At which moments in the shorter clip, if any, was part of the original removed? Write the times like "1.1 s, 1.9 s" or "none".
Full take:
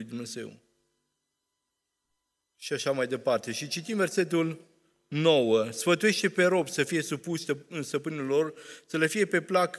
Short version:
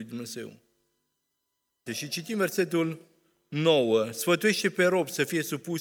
1.9 s